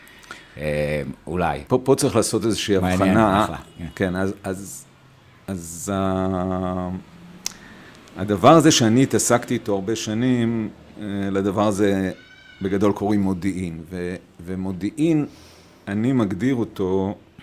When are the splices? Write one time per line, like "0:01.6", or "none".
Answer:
0:01.7

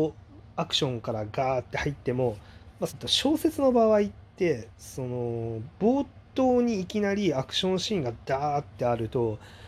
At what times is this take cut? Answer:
0:02.9

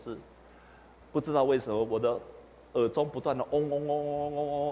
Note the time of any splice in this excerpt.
none

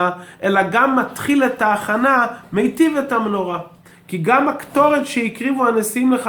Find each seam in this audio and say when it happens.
0:03.9

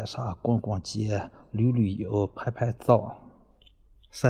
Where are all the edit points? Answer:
none

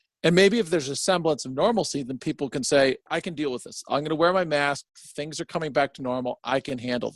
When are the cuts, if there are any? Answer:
0:03.1

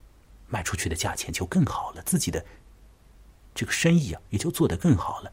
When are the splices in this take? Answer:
none

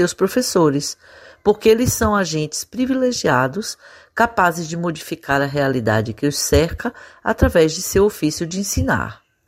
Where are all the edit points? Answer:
none

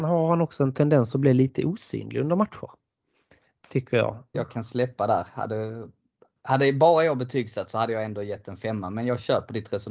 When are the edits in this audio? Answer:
0:04.3

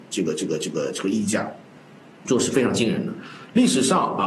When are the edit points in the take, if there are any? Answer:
none

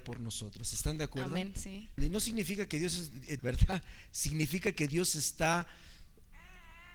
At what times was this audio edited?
0:02.0
0:03.4

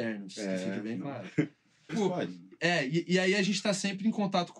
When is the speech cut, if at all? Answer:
0:01.9

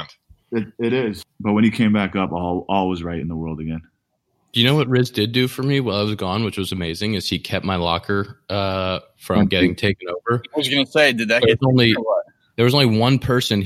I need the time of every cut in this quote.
none

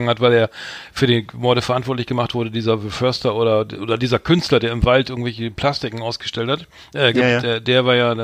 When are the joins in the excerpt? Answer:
none

